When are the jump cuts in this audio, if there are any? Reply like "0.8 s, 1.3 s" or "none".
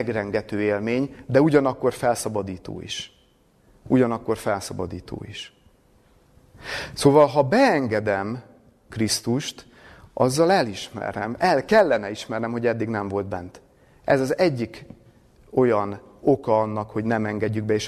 none